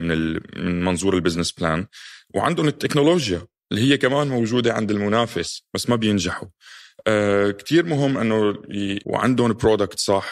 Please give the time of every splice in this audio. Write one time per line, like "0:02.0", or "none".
0:09.0